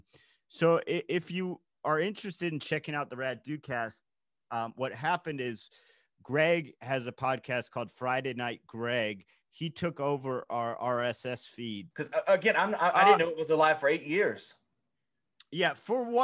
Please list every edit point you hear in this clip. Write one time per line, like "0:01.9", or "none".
0:11.9